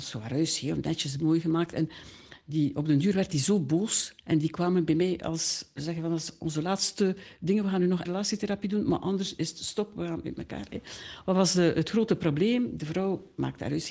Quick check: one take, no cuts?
no; 1 cut; at 8.1 s

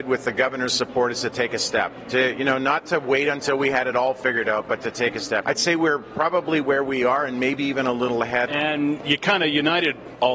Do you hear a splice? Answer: yes; 2 cuts; at 5.4 s, 8.5 s

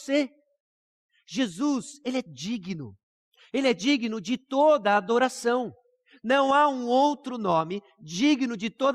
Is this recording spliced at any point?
no; 0 cuts

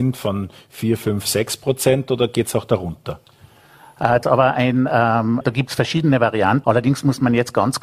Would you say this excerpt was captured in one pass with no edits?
no; 3 cuts; at 4.2 s, 5.4 s, 6.6 s

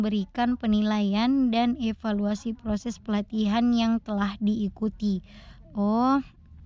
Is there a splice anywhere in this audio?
yes; 1 cut; at 5.6 s

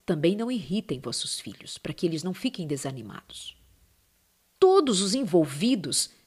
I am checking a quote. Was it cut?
yes; 1 cut; at 4.6 s

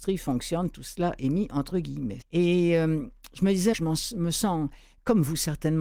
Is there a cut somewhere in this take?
yes; 2 cuts; at 2.2 s, 3.7 s

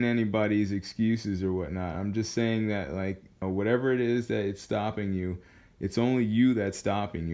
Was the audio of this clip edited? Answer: no; 0 cuts

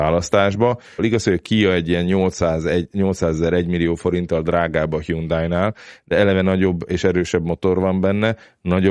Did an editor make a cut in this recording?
yes; 1 cut; at 1.0 s

